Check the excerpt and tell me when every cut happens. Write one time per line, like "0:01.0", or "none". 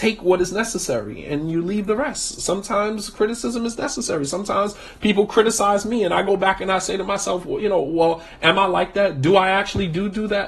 none